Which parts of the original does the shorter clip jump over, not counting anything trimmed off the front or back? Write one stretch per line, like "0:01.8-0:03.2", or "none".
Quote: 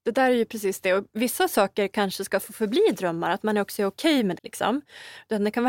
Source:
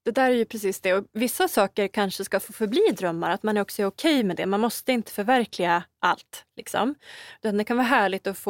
0:04.4-0:06.5